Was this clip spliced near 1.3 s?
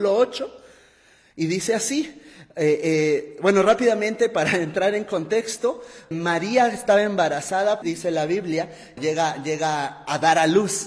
no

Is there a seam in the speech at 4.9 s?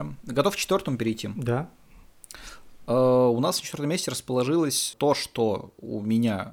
yes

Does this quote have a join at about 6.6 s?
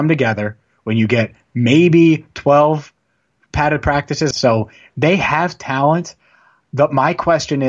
no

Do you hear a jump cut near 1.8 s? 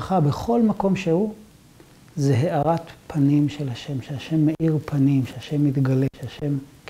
no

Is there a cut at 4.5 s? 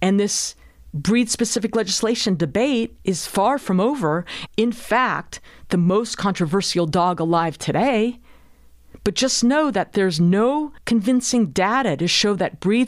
yes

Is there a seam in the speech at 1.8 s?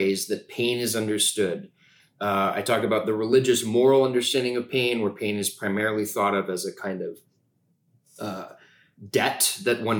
no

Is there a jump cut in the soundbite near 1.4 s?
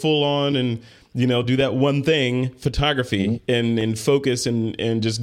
no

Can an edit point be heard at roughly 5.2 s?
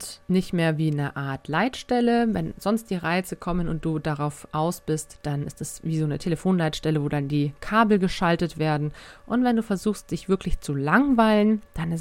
yes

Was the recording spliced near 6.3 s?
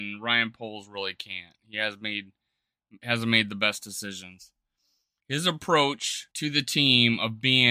yes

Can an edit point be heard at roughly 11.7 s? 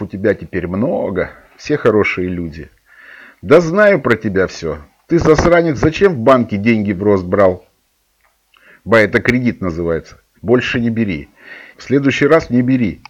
yes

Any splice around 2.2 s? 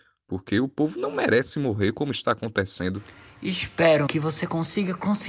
no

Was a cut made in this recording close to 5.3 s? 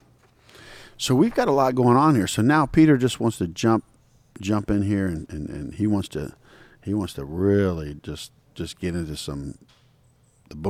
yes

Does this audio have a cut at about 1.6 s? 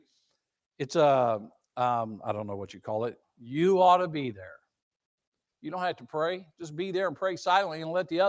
no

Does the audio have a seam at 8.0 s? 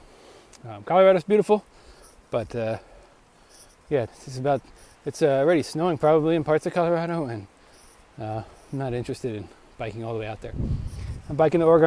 no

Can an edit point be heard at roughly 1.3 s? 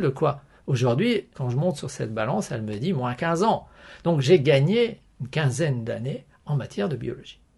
yes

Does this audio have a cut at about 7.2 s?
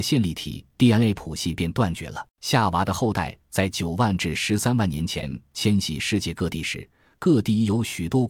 no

